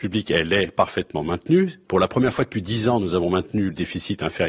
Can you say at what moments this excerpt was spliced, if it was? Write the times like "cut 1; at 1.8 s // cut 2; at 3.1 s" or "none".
none